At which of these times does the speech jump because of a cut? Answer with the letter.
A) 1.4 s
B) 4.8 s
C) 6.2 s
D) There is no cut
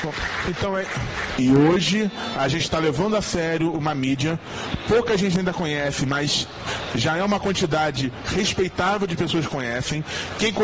A